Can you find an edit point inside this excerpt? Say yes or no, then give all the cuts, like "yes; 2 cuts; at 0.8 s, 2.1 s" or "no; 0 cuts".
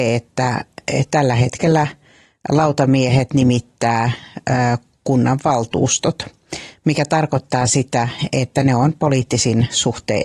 no; 0 cuts